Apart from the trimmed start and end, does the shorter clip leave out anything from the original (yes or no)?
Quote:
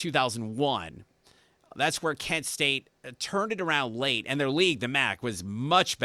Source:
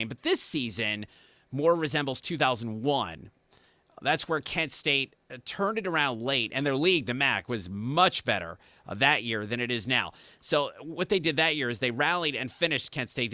no